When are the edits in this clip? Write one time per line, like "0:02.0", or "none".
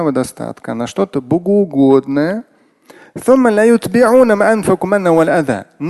none